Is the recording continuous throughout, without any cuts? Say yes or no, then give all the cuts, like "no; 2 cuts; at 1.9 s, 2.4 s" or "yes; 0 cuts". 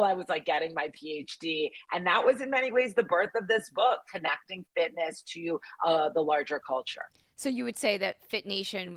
yes; 0 cuts